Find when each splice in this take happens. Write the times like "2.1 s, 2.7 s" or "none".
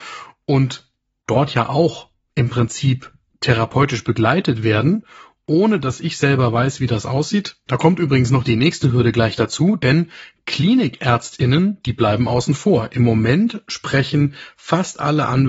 7.7 s